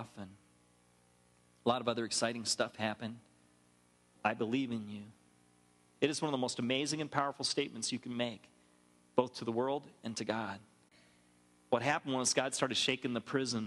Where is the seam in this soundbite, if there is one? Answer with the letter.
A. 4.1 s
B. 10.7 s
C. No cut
A